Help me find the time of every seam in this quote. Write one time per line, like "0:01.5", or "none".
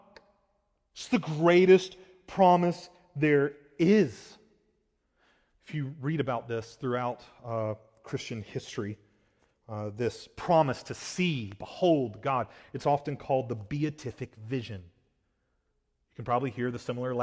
none